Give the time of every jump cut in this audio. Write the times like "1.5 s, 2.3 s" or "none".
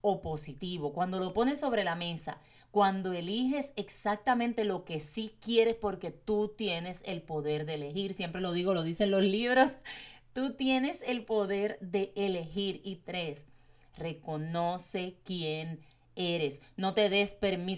none